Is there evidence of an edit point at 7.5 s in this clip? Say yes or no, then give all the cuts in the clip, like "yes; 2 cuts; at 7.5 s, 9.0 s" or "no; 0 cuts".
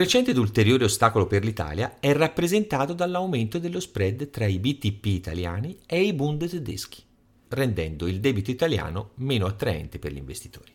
yes; 1 cut; at 7.5 s